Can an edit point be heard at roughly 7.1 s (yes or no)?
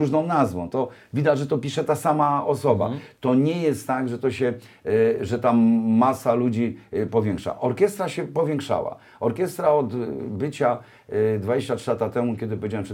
yes